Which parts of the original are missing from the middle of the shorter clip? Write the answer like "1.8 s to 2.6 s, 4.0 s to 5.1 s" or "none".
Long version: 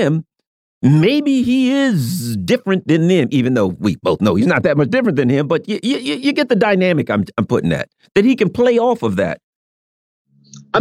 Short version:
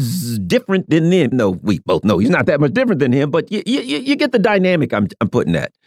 3.3 s to 3.5 s

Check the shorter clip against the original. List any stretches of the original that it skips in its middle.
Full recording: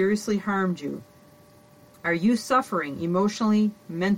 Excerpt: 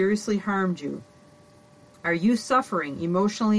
none

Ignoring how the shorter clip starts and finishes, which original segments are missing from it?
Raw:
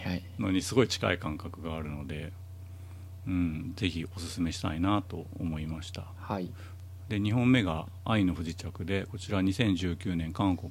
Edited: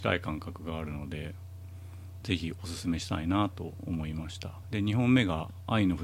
3.2 s to 3.7 s, 6.2 s to 7.0 s

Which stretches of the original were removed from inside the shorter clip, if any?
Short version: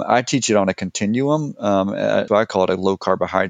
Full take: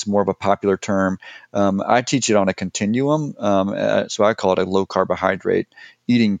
4.1 s to 4.2 s

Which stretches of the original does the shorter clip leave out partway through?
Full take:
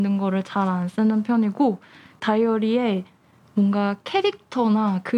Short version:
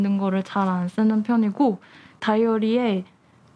none

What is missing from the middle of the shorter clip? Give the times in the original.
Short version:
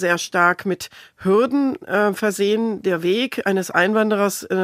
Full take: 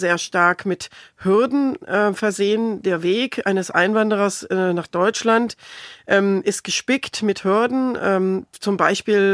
none

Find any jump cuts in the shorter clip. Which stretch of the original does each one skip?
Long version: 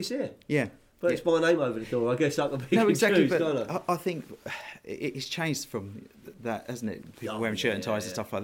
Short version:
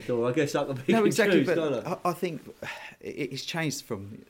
none

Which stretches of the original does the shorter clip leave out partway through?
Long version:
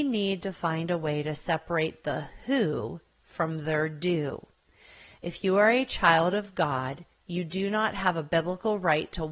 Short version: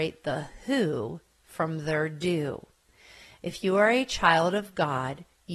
none

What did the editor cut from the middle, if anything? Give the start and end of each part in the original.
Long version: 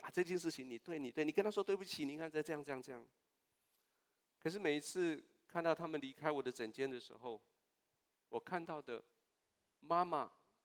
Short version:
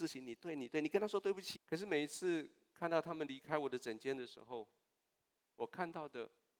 2.0 s to 4.3 s

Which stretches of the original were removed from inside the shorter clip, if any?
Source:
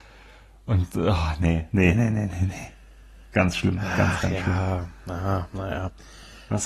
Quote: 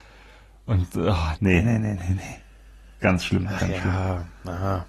1.4 s to 1.7 s, 3.9 s to 4.2 s

